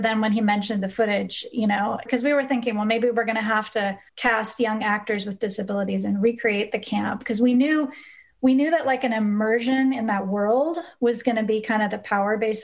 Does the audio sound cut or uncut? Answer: cut